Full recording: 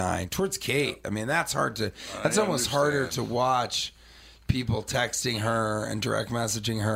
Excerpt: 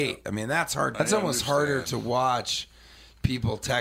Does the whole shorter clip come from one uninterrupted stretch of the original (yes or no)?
no